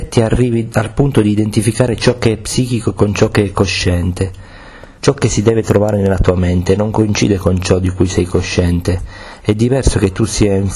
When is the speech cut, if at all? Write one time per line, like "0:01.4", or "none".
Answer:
0:05.0